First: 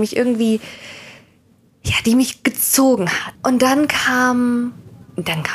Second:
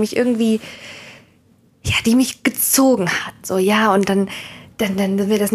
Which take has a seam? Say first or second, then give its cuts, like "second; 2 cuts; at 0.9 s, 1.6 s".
first; 1 cut; at 3.4 s